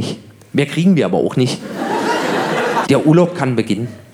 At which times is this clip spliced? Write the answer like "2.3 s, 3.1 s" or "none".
2.8 s